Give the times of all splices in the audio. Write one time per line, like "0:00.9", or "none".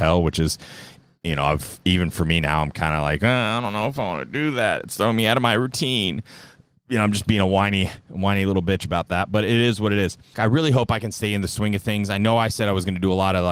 0:10.3